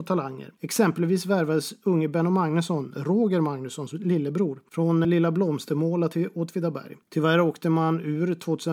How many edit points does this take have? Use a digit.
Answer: 2